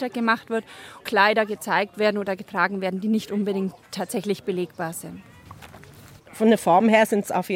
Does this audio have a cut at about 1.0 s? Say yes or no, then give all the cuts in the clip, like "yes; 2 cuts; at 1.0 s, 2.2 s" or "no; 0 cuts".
no; 1 cut; at 6.2 s